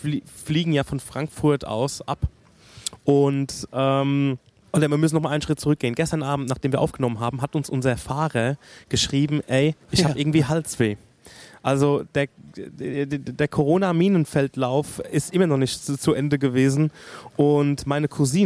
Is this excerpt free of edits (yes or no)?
no